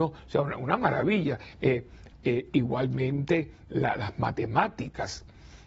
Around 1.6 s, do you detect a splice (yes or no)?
yes